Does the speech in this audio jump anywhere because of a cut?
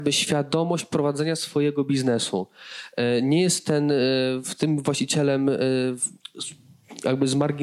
no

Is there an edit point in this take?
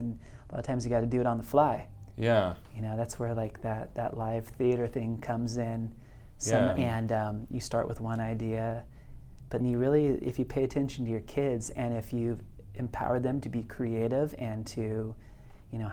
yes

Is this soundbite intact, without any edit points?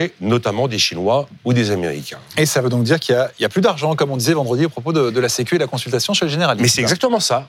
yes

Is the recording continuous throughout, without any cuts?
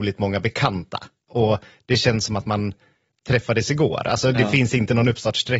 no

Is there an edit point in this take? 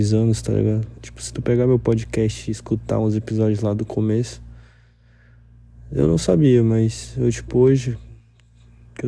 yes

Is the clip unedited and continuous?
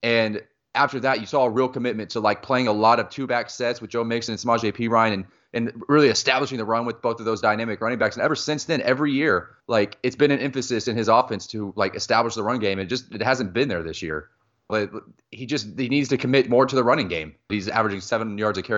no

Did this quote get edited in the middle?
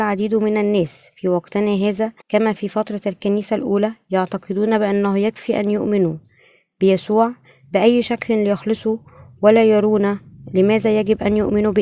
yes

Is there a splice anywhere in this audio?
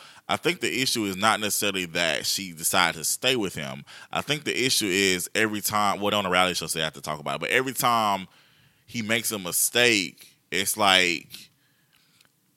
no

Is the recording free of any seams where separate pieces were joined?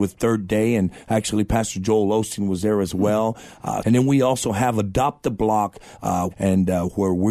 no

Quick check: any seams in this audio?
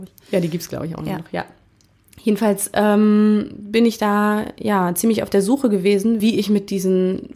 yes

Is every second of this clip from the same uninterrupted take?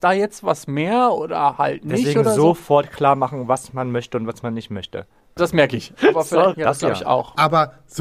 no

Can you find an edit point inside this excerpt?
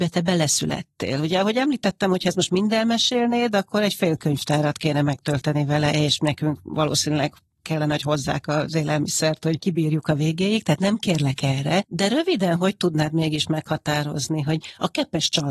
no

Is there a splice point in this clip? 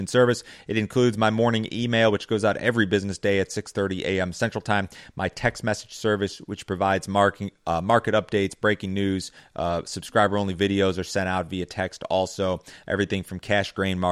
yes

